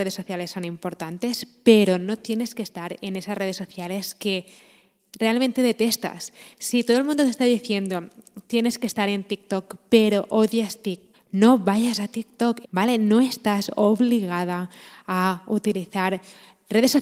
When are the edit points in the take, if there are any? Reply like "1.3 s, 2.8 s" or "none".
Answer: 11.1 s, 12.6 s